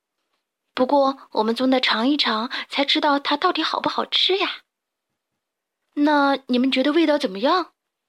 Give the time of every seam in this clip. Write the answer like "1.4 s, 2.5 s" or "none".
none